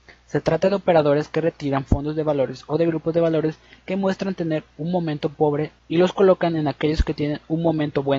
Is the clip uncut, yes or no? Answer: yes